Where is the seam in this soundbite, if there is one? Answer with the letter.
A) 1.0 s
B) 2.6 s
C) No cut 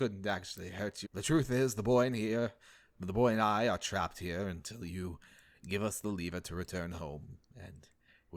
A